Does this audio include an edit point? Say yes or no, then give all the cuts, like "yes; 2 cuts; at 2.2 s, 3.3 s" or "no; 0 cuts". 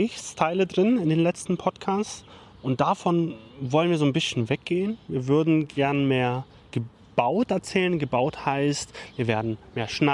no; 0 cuts